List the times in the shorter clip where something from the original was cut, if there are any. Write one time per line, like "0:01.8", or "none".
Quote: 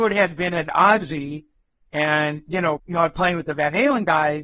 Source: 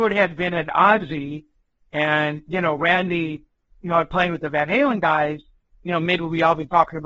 0:02.8

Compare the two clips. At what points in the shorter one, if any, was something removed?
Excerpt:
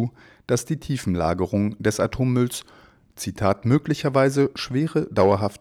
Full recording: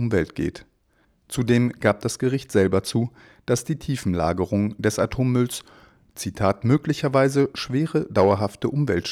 none

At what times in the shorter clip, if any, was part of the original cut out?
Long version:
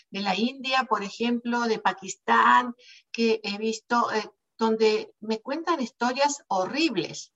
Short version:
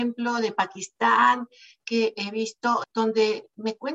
0:02.8

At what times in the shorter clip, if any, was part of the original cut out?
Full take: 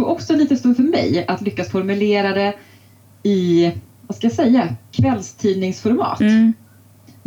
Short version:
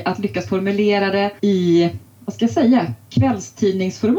0:01.4

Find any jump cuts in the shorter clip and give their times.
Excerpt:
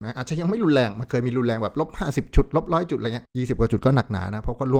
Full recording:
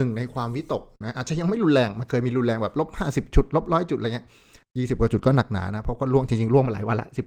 0:03.3

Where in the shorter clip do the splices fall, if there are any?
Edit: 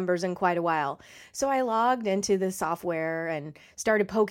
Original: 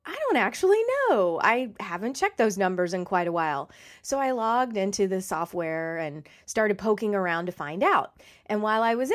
none

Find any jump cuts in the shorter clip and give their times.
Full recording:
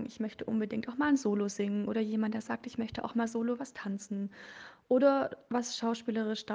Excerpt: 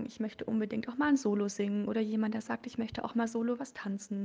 none

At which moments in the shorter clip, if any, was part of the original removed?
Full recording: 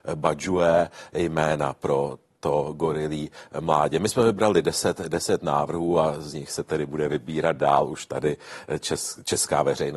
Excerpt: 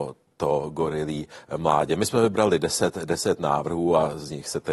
none

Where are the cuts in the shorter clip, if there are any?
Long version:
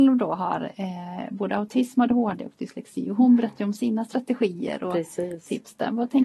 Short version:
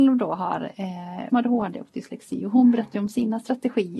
0:01.3

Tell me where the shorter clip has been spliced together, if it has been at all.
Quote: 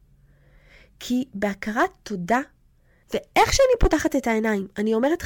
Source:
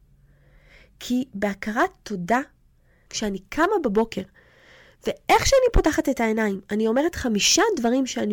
0:03.0

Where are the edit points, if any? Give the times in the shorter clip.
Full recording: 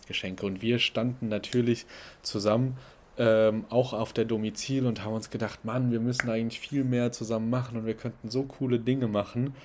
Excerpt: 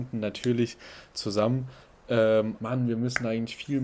0:02.6

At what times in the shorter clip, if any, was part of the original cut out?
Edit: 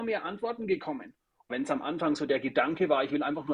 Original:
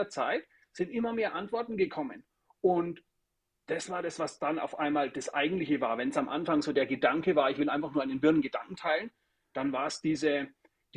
0:01.5

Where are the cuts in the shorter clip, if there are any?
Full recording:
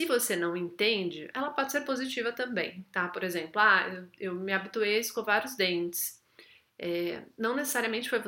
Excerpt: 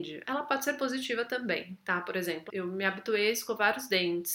0:02.5

